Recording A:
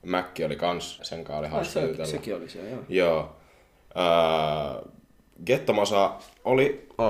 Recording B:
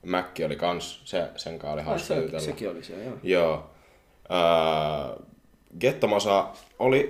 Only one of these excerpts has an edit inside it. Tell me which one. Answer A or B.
A